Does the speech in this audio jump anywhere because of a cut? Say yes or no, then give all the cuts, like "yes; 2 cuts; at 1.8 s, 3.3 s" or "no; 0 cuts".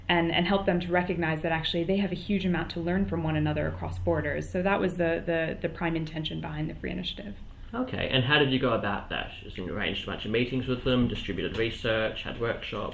no; 0 cuts